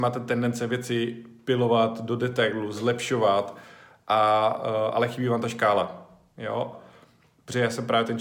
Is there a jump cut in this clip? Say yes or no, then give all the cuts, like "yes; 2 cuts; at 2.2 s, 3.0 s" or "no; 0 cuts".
yes; 1 cut; at 6.7 s